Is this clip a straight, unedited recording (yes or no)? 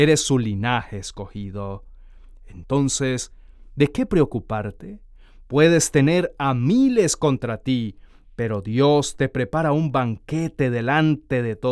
yes